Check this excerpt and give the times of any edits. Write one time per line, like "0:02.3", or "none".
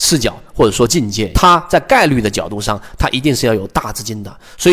0:01.3

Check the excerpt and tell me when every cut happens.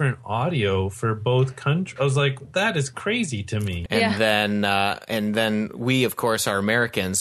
0:03.9

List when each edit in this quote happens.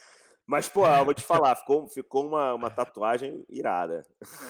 none

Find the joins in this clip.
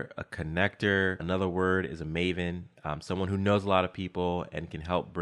0:01.2

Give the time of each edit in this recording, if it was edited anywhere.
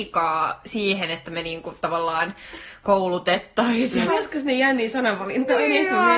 0:04.1

